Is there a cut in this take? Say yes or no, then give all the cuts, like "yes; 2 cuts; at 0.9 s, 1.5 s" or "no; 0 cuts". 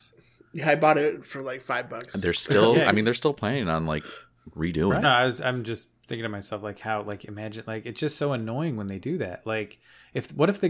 yes; 1 cut; at 5.0 s